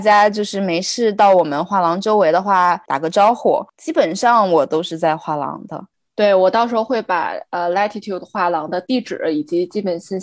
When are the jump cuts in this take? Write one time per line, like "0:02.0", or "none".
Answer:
none